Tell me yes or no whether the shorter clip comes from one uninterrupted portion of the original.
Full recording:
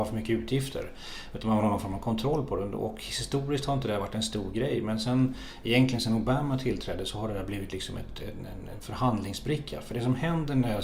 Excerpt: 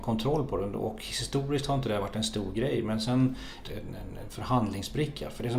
no